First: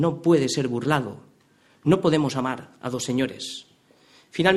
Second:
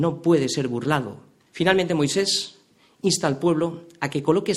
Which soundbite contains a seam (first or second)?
second